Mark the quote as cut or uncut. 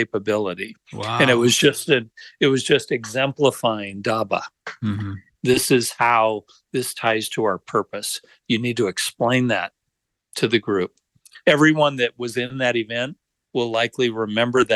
cut